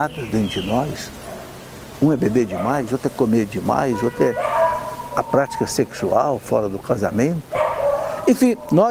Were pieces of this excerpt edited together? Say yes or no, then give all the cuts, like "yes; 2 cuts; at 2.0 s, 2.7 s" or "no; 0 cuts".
no; 0 cuts